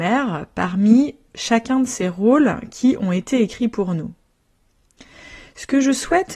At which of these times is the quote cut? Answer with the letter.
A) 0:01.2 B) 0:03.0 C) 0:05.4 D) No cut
D